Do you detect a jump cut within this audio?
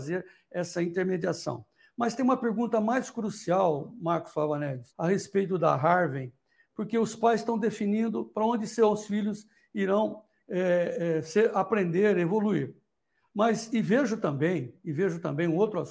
yes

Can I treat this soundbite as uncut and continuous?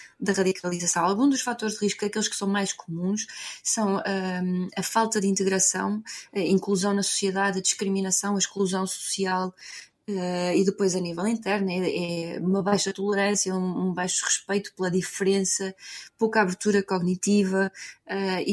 yes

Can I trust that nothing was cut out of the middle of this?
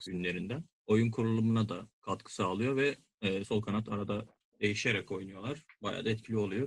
no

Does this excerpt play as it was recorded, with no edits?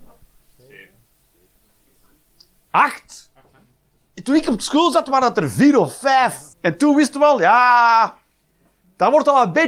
no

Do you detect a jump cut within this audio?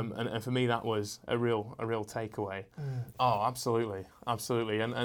yes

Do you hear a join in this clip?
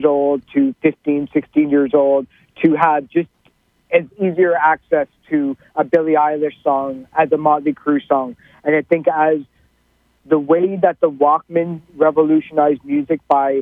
no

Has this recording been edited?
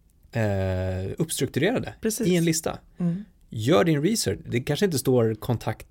no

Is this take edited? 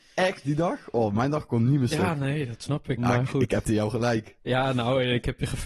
yes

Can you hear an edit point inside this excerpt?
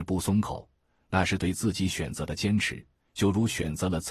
no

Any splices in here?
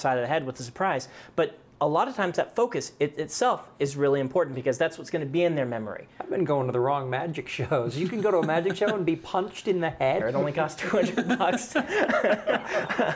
yes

